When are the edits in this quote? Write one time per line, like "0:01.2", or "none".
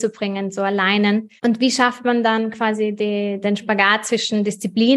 0:01.4
0:03.4